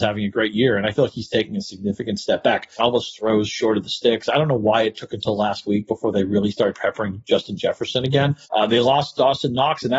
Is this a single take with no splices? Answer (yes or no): no